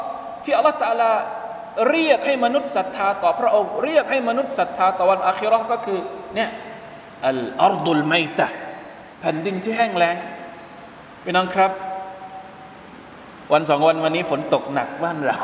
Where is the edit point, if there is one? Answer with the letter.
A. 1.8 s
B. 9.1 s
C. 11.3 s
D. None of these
B